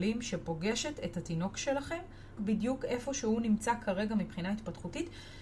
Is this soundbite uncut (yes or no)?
no